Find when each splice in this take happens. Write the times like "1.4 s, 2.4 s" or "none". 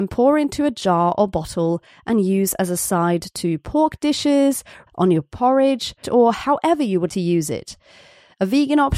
4.9 s, 6.0 s, 7.1 s